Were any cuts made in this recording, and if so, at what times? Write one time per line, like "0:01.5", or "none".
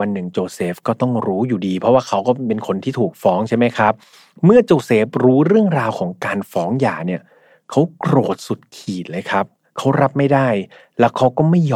none